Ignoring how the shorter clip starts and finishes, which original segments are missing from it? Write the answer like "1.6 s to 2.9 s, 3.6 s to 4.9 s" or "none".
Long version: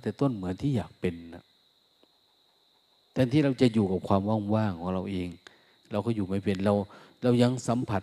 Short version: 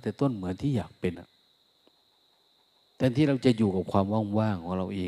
1.1 s to 1.3 s

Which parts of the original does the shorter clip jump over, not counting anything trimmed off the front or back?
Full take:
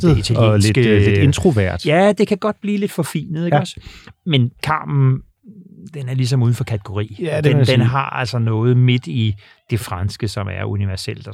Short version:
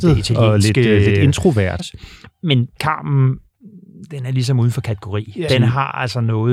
1.8 s to 3.6 s, 7.3 s to 7.7 s

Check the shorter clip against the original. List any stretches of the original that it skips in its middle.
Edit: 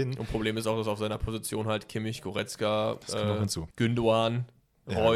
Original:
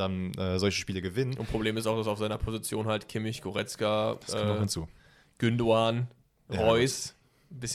4.9 s to 5.3 s

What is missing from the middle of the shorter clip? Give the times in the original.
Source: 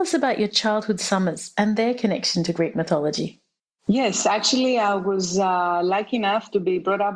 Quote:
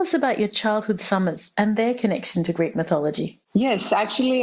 3.4 s to 3.8 s

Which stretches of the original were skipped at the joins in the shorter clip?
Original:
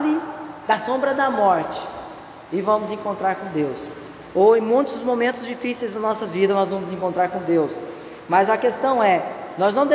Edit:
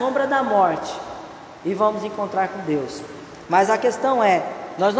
4.3 s to 8.2 s

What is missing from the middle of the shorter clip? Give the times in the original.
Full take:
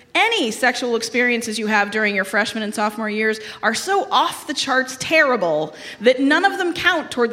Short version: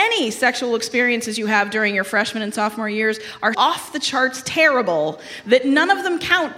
3.7 s to 4.1 s

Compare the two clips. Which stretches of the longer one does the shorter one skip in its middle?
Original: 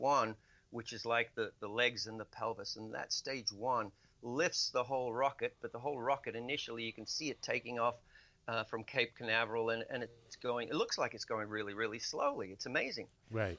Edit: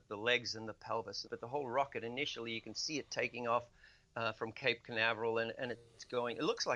2.8 s to 5.6 s

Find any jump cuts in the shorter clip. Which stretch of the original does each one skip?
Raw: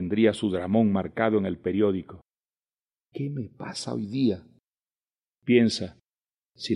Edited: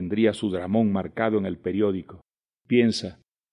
2.5 s to 5.3 s

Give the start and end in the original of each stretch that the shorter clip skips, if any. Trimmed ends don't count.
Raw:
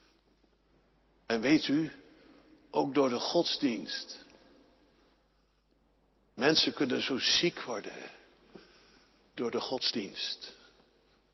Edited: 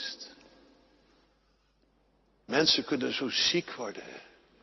none

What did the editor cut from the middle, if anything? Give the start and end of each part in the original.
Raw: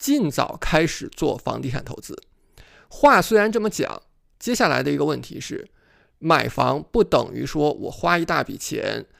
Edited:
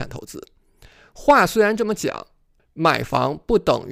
4.3 s to 6.0 s

